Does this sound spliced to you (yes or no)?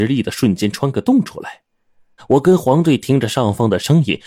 yes